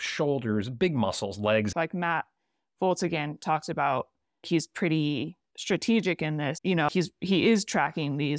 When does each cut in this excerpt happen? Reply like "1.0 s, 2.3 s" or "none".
1.7 s, 4.4 s, 6.9 s